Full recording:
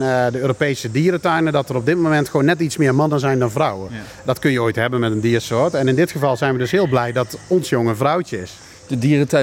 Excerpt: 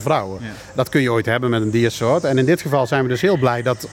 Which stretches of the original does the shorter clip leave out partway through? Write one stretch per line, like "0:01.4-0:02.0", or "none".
none